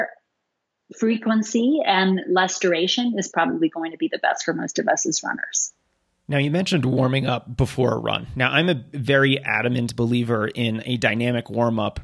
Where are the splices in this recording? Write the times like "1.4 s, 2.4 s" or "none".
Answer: none